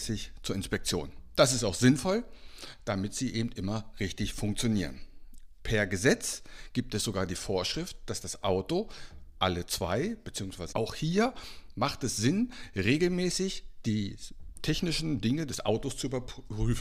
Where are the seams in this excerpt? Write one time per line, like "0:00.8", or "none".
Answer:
0:10.7